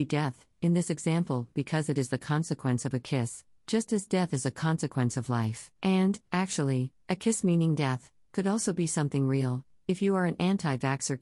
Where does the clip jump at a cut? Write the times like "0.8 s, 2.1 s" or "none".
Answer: 5.7 s